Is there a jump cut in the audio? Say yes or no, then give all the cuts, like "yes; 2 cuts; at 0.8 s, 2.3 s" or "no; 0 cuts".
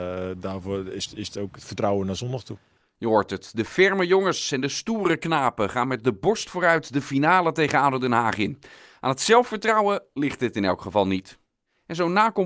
no; 0 cuts